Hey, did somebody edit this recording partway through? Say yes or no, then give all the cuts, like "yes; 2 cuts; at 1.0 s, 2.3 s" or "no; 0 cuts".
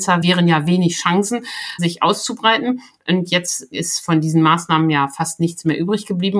yes; 1 cut; at 1.8 s